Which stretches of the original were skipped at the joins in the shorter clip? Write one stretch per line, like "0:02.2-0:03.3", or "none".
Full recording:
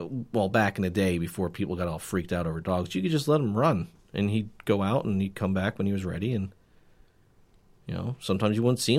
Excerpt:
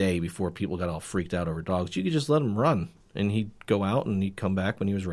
none